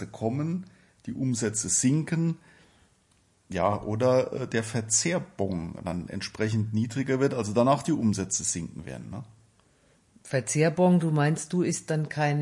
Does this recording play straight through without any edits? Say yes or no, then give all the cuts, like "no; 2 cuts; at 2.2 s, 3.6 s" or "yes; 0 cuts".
yes; 0 cuts